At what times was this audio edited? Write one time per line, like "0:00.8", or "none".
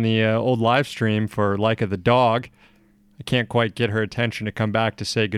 none